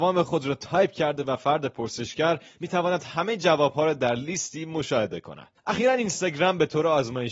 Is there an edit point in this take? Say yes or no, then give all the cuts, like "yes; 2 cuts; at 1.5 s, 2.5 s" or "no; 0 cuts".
yes; 1 cut; at 5.6 s